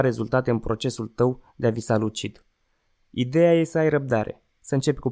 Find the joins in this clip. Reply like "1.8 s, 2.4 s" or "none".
none